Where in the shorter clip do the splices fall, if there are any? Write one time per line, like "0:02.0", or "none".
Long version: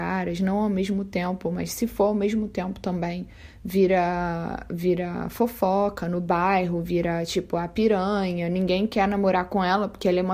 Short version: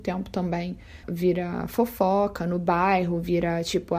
0:01.0